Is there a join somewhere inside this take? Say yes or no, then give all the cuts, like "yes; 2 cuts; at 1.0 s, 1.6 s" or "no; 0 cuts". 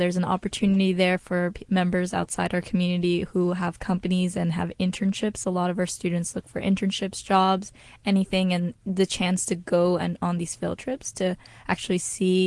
no; 0 cuts